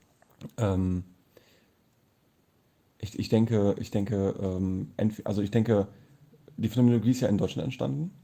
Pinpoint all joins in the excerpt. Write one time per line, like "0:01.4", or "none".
none